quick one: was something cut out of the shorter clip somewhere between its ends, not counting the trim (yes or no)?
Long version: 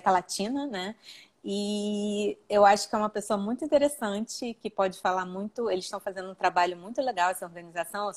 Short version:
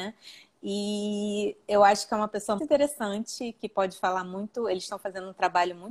yes